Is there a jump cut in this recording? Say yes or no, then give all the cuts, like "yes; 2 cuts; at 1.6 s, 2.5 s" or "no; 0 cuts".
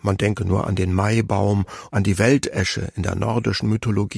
yes; 1 cut; at 1.9 s